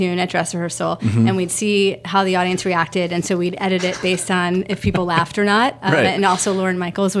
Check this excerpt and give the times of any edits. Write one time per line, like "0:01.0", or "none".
none